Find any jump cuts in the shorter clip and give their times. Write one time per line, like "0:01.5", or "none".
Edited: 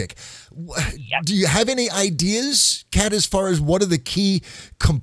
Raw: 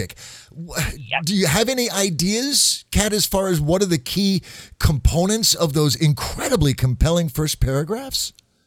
none